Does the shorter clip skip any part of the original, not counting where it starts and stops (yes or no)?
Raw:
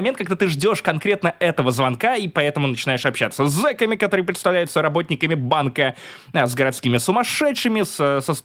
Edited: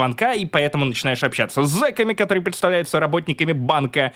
no